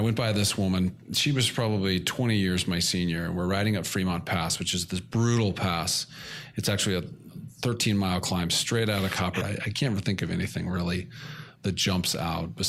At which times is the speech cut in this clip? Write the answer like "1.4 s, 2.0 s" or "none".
9.4 s